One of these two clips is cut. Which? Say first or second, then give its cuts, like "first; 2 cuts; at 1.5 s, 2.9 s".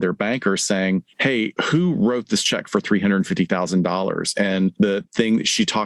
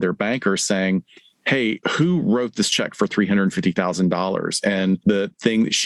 first; 1 cut; at 1.1 s